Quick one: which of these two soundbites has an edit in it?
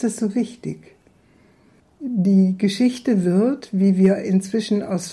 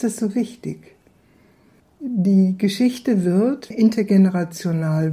second; 1 cut; at 3.7 s

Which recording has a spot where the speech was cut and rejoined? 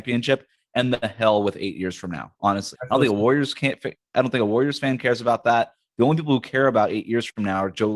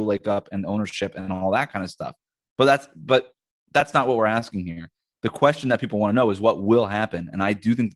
first; 1 cut; at 2.7 s

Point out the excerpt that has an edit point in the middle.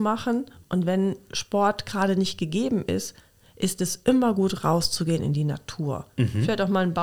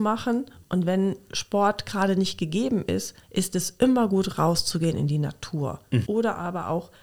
second; 2 cuts; at 3.2 s, 6.0 s

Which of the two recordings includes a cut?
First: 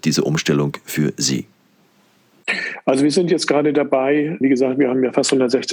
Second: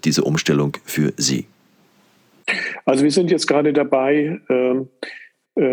first; 1 cut; at 4.4 s

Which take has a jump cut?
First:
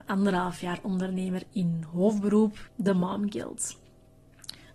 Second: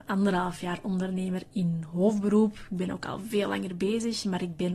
first; 1 cut; at 2.6 s

